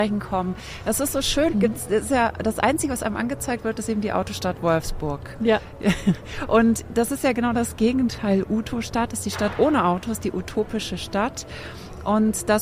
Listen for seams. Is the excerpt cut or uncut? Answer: cut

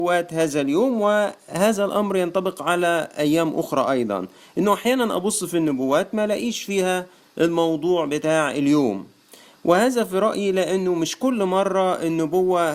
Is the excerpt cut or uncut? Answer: uncut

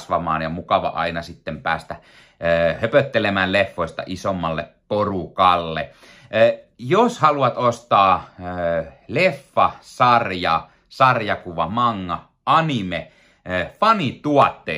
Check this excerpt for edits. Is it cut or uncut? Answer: uncut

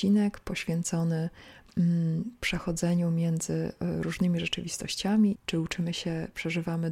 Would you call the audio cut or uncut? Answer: cut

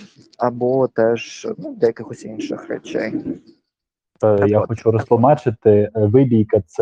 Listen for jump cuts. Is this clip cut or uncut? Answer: uncut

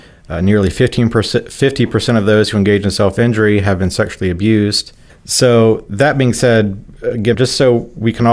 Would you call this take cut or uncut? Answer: cut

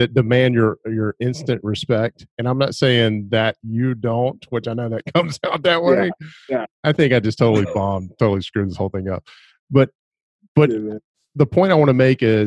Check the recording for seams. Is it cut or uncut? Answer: uncut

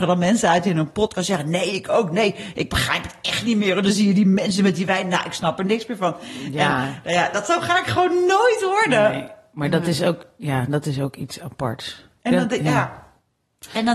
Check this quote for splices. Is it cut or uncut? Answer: uncut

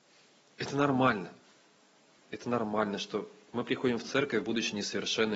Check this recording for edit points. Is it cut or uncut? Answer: cut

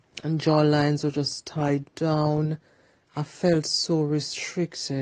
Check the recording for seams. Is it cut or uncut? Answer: uncut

